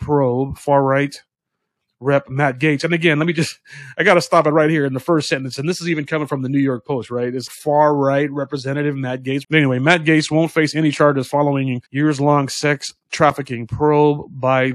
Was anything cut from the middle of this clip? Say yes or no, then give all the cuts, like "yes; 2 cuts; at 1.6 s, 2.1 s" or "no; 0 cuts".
yes; 3 cuts; at 7.5 s, 9.4 s, 11.9 s